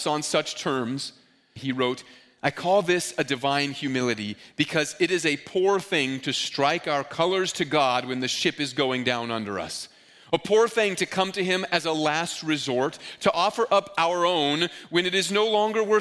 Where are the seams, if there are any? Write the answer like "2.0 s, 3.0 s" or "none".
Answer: 1.6 s